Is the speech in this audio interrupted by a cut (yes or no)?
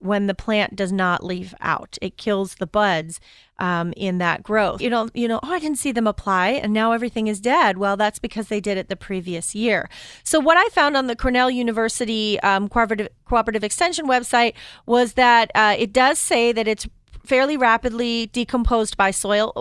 yes